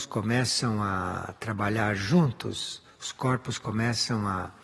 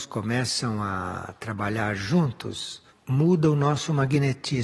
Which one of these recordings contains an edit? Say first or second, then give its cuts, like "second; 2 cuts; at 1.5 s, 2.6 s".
second; 1 cut; at 2.9 s